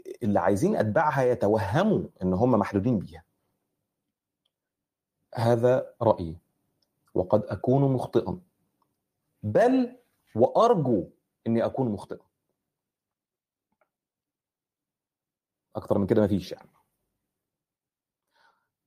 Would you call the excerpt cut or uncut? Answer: uncut